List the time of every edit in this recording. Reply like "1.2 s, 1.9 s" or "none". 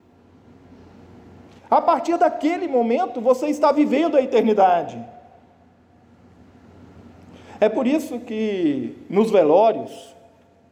1.6 s